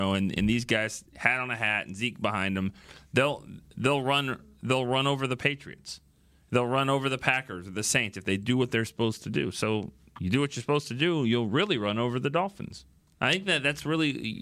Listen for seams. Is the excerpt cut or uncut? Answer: uncut